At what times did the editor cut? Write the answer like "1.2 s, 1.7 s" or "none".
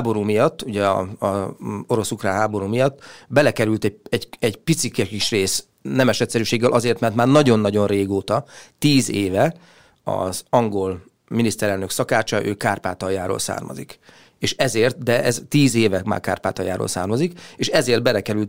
none